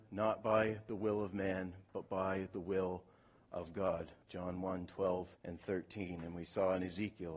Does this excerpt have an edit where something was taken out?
yes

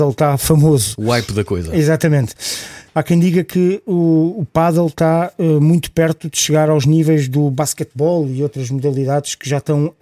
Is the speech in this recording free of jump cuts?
no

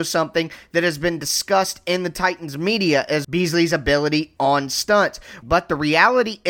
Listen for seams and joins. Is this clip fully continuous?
no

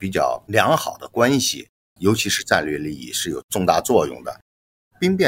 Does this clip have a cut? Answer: yes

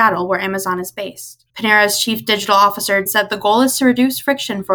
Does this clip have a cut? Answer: yes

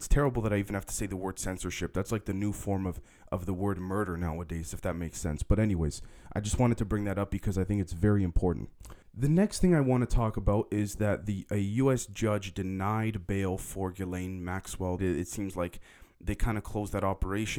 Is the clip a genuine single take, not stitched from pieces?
no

